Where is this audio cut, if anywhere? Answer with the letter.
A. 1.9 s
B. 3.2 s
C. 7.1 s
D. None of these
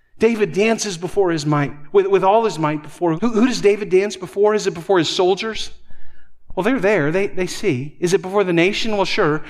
B